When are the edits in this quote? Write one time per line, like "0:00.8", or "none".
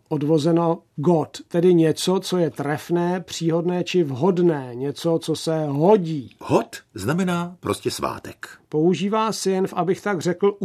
0:06.4
0:08.6

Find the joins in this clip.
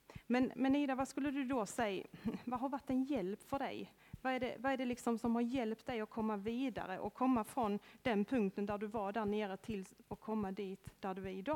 none

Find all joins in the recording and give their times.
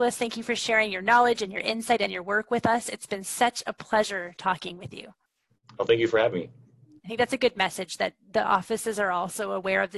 0:07.0

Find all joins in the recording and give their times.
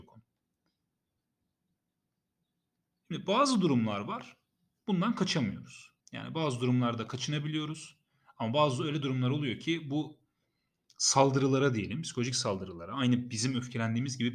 0:06.0

